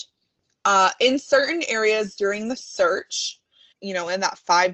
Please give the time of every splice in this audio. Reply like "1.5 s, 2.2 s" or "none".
3.7 s